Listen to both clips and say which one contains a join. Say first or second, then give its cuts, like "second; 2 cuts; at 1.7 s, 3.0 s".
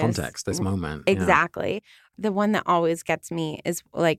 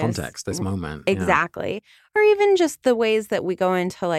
first; 1 cut; at 2.1 s